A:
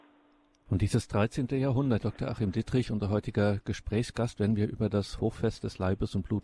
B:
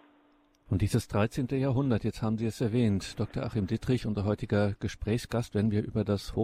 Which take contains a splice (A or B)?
A